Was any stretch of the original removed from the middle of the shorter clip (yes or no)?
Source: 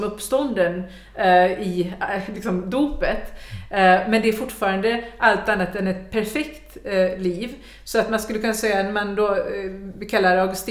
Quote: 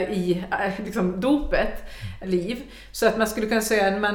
yes